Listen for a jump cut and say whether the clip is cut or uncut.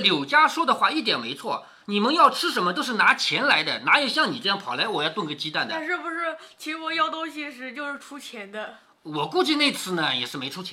uncut